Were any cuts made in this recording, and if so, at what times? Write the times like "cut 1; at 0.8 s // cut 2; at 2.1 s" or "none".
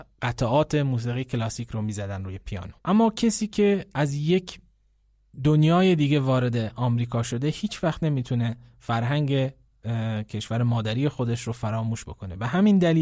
cut 1; at 2.8 s